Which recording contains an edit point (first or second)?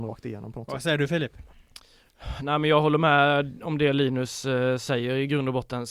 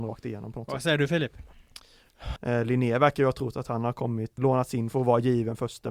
second